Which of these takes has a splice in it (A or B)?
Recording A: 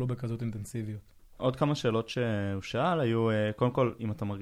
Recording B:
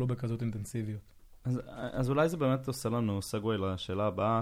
A